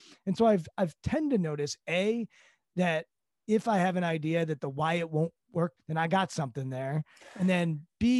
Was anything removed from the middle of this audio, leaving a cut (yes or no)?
yes